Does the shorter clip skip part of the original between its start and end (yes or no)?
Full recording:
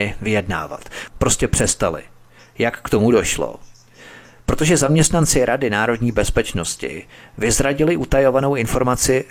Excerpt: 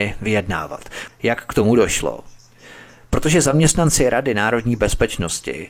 yes